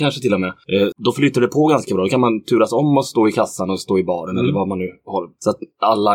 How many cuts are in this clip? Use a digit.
1